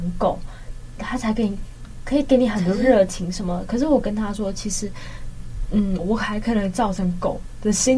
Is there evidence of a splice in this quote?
yes; 1 cut; at 6.0 s

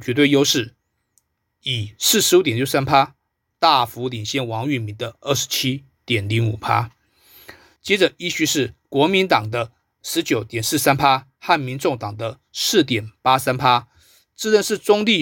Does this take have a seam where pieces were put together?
yes; 1 cut; at 7.8 s

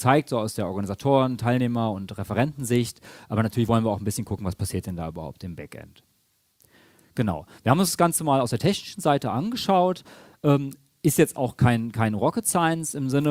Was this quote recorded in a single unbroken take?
yes; 0 cuts

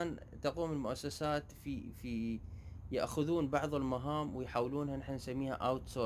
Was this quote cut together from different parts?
no; 0 cuts

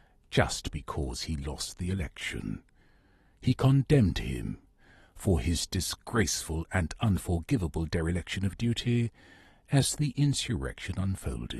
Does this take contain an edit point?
no; 0 cuts

